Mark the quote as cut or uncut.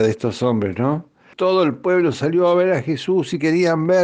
cut